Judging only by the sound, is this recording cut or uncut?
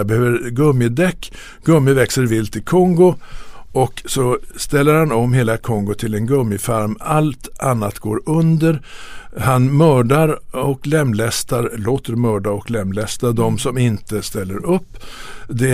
uncut